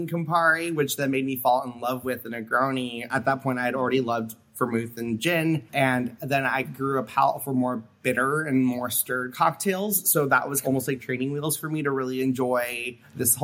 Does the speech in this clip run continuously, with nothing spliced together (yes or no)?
no